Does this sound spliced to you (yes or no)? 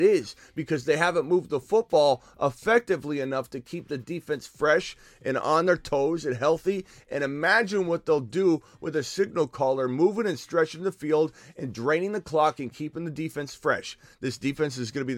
no